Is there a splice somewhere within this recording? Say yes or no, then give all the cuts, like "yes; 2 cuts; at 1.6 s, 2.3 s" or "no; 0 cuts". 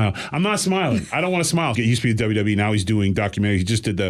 yes; 1 cut; at 1.8 s